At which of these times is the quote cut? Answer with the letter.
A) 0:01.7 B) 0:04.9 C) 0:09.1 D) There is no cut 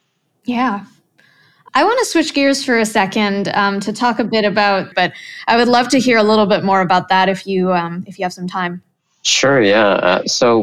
B